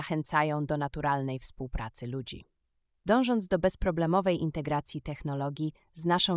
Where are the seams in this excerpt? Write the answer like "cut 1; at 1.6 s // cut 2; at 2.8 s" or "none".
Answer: cut 1; at 3.0 s